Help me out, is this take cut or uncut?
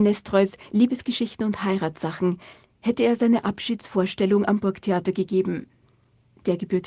uncut